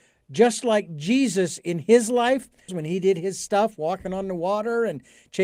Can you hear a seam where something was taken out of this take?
yes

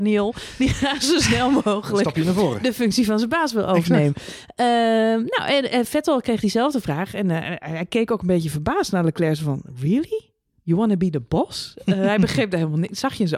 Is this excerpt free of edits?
yes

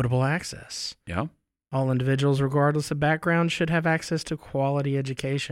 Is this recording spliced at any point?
no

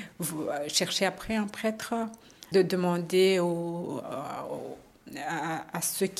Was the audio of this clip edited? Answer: yes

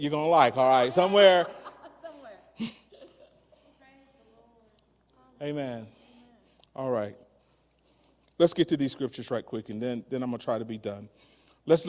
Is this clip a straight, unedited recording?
yes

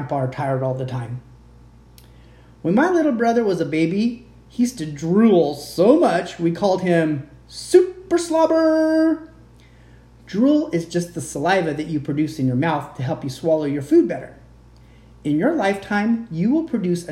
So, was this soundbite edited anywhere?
no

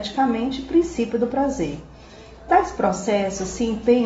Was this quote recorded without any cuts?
yes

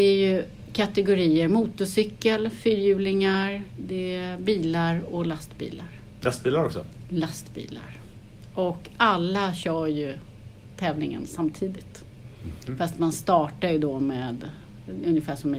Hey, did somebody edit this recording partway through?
no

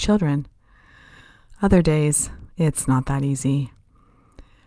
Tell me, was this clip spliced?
no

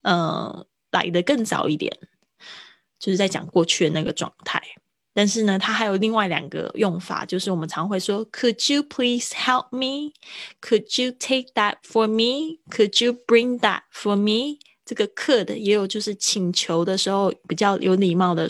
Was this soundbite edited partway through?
no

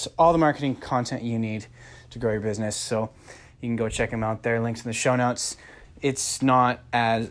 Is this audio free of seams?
no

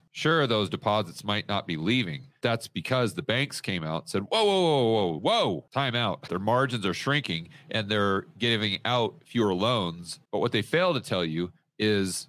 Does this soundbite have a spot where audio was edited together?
yes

